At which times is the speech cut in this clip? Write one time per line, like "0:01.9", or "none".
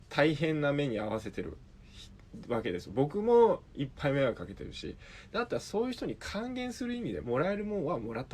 0:07.2